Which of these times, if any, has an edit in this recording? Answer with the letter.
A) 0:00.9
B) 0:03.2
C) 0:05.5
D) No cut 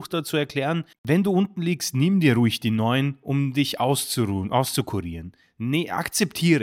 A